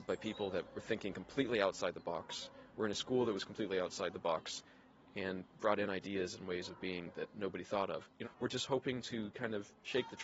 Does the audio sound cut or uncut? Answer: cut